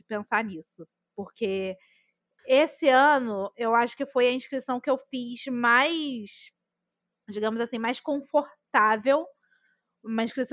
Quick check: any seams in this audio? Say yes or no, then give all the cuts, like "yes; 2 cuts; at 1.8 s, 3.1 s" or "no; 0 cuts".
no; 0 cuts